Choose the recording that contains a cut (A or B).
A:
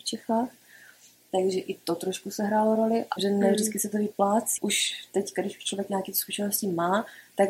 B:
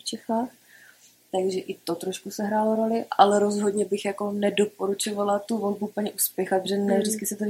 A